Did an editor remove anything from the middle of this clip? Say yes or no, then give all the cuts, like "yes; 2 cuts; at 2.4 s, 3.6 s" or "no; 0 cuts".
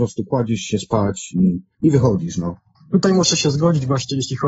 no; 0 cuts